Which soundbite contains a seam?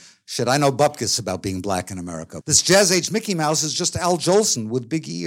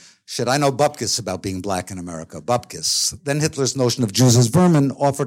first; 1 cut; at 2.4 s

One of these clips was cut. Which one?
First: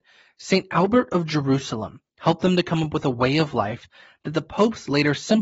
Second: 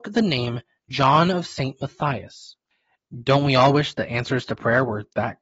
second; 1 cut; at 3.0 s

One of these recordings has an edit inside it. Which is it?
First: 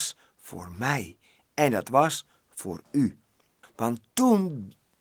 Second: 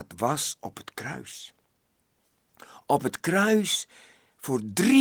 first; 1 cut; at 3.6 s

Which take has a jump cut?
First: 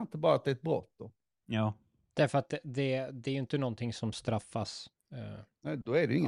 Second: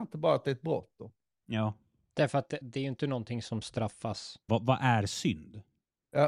second; 2 cuts; at 2.6 s, 4.5 s

